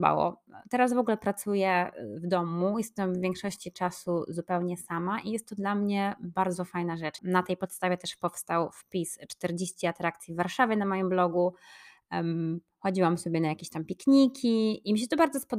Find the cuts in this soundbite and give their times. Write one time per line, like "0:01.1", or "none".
0:07.2